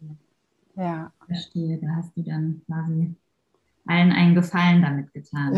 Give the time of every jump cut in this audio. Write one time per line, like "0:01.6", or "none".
none